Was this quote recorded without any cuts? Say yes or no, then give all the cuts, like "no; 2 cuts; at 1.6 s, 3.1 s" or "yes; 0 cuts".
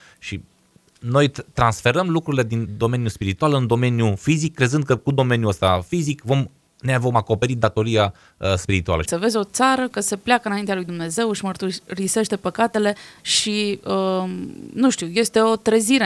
no; 2 cuts; at 9.0 s, 13.2 s